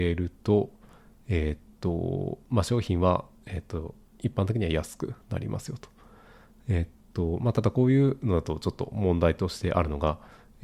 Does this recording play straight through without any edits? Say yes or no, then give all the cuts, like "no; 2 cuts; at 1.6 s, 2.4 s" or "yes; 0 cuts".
yes; 0 cuts